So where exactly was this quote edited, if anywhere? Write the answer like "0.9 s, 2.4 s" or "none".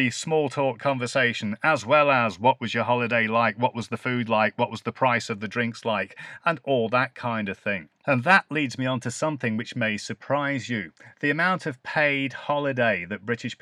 none